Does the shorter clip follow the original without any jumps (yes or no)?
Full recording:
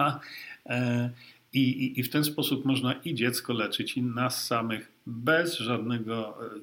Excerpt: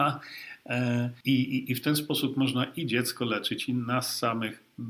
no